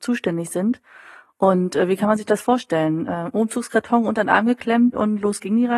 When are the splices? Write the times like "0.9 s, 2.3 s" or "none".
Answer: none